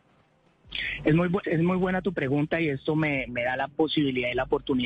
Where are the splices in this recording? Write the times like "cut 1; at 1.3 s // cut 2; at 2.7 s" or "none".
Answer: cut 1; at 1.4 s // cut 2; at 3.3 s